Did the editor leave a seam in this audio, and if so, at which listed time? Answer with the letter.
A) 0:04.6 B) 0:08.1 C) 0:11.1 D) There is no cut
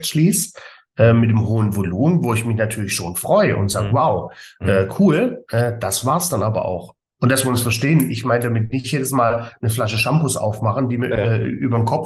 D